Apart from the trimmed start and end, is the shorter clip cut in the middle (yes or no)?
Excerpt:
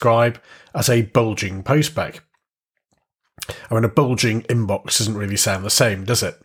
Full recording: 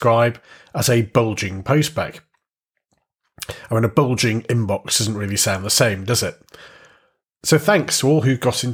no